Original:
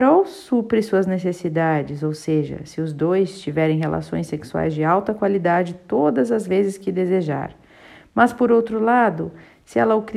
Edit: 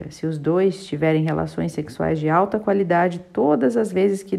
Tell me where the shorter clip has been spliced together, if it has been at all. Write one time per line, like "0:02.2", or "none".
none